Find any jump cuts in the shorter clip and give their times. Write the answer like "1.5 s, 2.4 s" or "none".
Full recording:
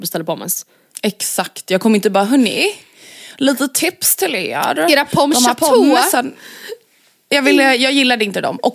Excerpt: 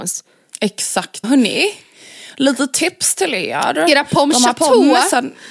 1.2 s